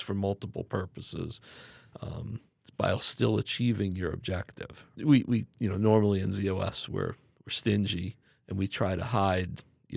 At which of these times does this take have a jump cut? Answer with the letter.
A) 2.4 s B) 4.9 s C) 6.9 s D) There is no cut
B